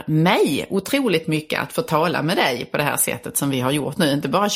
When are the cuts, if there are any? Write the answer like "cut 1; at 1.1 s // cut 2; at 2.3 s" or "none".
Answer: none